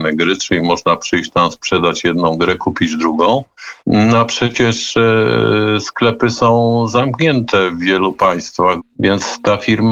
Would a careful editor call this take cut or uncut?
cut